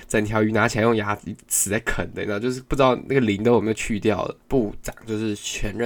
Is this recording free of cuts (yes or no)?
no